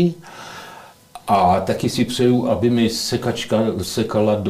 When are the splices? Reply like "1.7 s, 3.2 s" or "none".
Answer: none

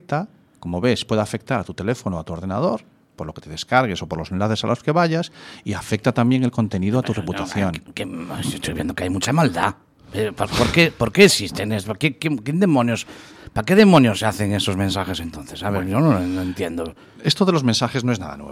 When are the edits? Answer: none

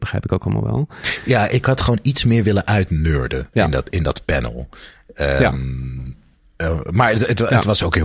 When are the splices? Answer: 3.5 s

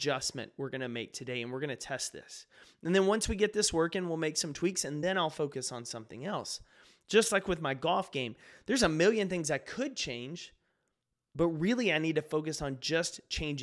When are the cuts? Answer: none

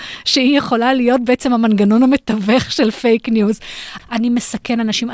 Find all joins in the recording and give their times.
4.0 s

